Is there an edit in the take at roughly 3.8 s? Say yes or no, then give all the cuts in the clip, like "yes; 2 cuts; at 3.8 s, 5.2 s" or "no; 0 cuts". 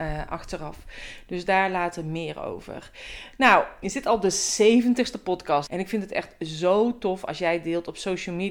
yes; 2 cuts; at 3.8 s, 5.7 s